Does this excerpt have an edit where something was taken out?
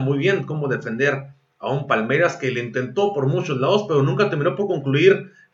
no; 0 cuts

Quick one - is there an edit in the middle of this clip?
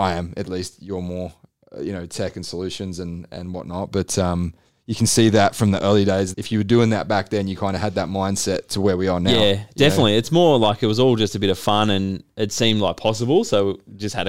yes; 1 cut; at 6.3 s

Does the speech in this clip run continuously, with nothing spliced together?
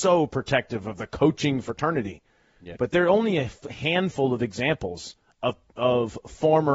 no; 1 cut; at 2.7 s

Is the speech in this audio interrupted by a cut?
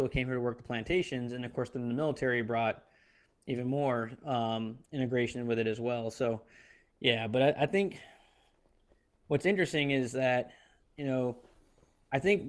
no; 0 cuts

